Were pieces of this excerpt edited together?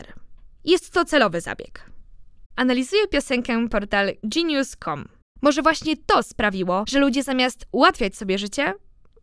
yes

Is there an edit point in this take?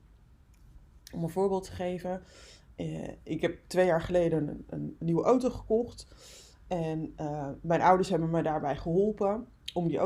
no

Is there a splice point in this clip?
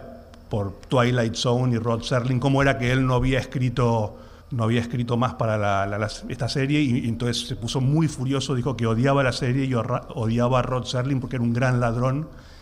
yes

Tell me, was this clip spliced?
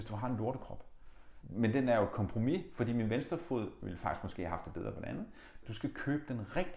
yes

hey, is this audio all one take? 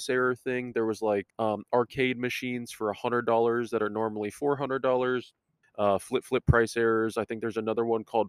no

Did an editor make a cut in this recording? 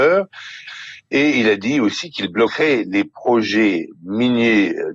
no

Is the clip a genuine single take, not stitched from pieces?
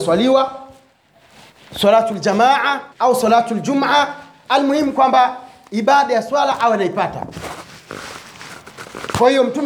no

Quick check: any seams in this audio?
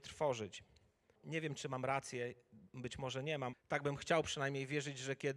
yes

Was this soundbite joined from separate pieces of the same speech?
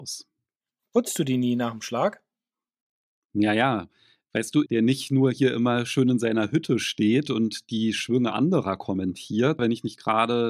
yes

